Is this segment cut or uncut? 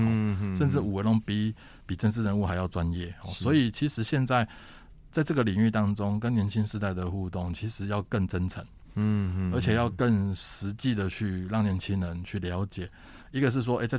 uncut